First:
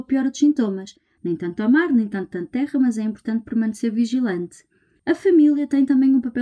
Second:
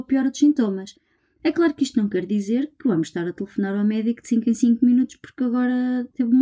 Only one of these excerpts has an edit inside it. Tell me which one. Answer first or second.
first